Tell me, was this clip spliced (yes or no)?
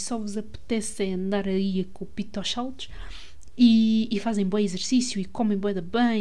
no